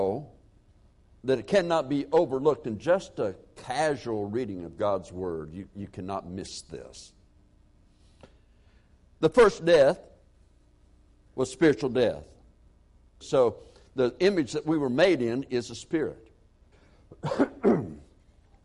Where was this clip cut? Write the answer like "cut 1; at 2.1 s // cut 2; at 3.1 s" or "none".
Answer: cut 1; at 13.2 s // cut 2; at 16.7 s